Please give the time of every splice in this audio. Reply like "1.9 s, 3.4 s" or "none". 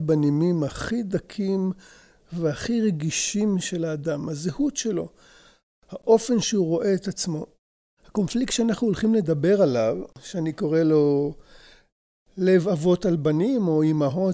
none